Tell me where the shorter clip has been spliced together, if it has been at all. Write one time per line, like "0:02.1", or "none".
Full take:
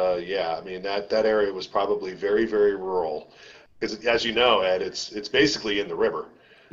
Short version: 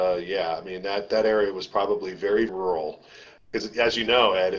0:02.5